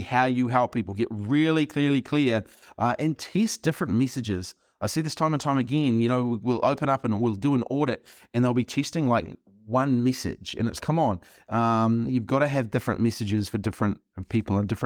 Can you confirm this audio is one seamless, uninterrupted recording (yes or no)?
no